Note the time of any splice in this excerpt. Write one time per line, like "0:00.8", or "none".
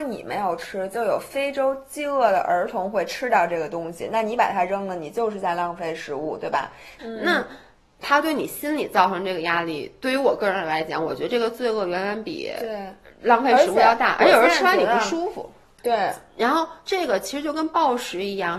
0:07.0
0:15.8

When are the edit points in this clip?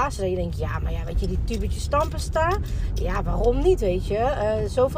none

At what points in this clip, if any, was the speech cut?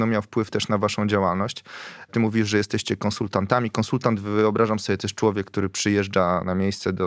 none

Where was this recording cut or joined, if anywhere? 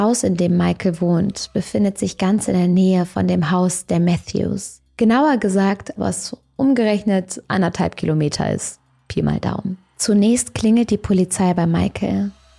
0:06.0

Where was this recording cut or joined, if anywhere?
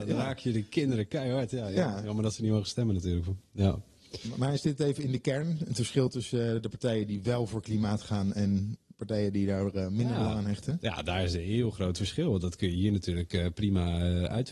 none

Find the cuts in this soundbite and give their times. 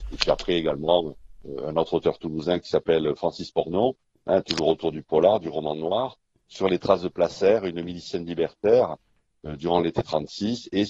none

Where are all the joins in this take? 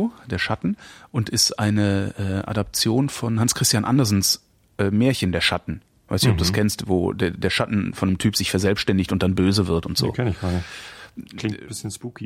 none

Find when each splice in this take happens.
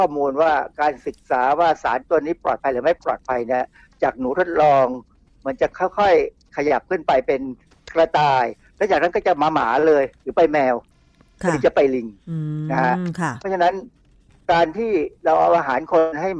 none

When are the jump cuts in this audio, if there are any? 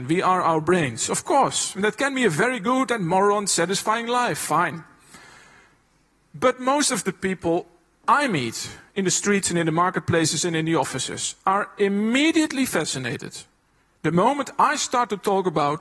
none

